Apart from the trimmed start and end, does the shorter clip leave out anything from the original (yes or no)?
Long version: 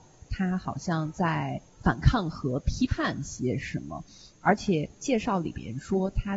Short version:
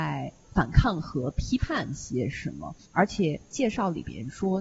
yes